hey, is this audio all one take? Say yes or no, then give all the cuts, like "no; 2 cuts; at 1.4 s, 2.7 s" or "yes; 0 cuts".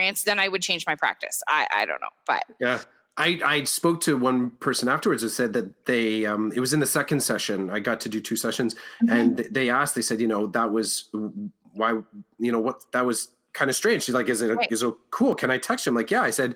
yes; 0 cuts